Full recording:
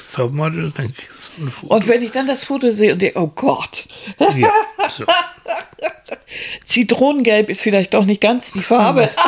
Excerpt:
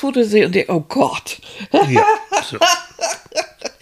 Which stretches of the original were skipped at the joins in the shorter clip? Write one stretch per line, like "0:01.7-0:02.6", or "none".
none

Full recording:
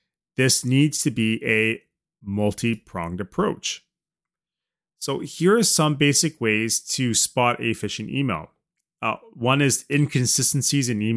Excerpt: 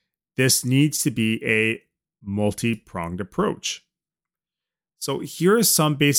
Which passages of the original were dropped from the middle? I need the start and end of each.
none

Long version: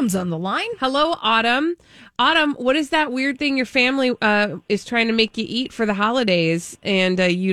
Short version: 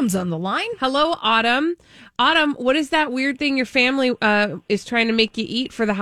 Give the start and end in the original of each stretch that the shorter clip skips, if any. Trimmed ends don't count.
none

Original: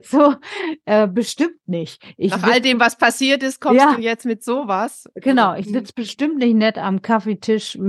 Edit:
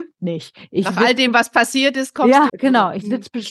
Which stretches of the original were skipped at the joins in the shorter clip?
0:04.0-0:05.1

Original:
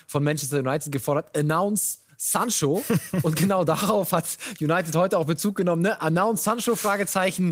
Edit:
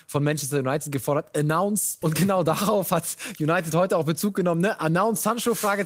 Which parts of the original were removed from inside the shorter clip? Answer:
0:02.0-0:03.2

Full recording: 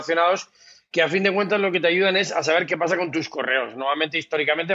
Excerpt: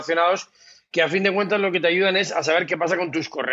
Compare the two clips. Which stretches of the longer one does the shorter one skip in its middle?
none

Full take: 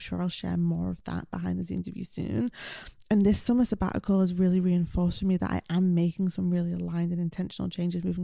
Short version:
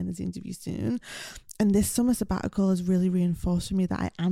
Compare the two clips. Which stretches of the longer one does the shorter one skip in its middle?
none

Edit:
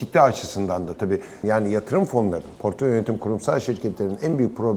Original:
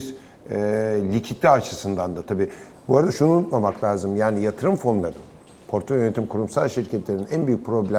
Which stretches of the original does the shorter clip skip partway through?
0:02.7-0:04.1
0:05.3-0:05.6

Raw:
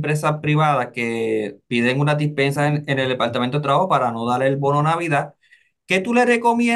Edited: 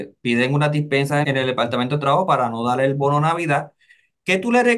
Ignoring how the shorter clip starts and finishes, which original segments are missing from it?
0:02.7-0:02.9

